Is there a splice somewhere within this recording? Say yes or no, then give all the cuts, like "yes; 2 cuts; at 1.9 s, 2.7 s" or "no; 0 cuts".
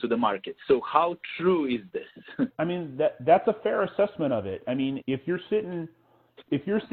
yes; 2 cuts; at 2.5 s, 5.0 s